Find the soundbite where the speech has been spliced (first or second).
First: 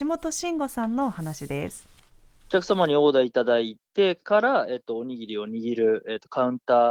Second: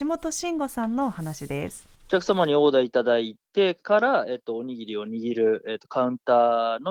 second